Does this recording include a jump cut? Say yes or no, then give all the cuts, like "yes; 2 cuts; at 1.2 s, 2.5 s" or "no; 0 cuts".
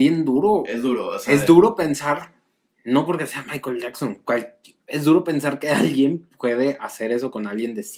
no; 0 cuts